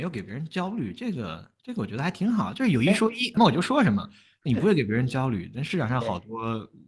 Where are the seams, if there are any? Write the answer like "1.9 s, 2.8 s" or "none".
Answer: 3.4 s

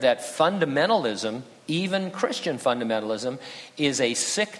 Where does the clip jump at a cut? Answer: none

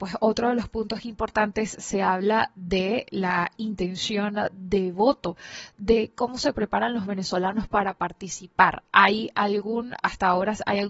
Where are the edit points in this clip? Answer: none

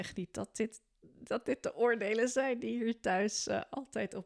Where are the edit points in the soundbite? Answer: none

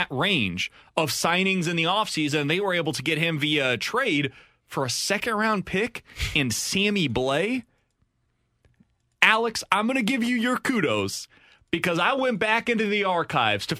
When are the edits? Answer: none

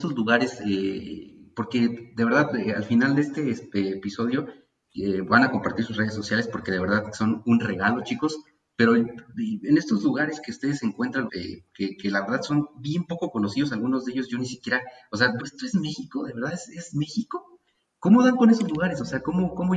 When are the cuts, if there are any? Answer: 11.3 s, 15.4 s

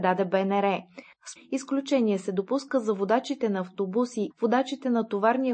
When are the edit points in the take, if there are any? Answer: 1.4 s, 4.3 s

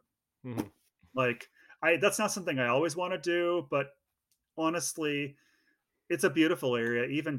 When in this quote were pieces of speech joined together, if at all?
none

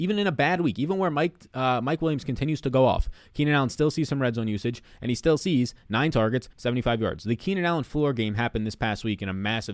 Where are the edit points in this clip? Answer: 6.5 s

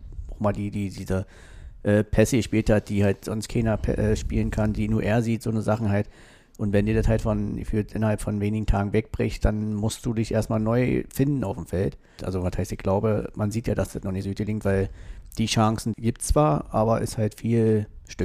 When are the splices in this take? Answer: 12.2 s, 15.9 s

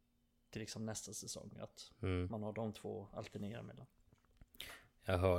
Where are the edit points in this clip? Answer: none

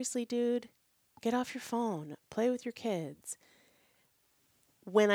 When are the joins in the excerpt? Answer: none

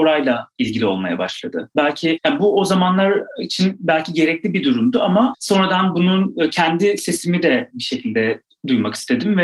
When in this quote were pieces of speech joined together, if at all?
1.8 s

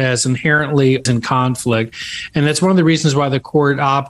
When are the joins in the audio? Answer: 1.1 s

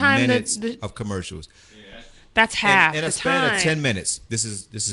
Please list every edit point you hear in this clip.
none

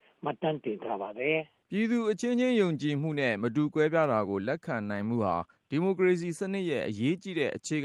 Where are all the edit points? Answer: 1.6 s

